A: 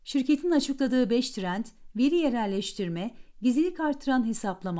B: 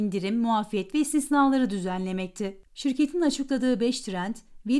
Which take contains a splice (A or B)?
B